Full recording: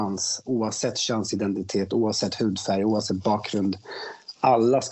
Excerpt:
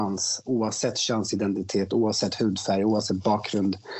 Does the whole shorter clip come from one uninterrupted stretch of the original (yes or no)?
yes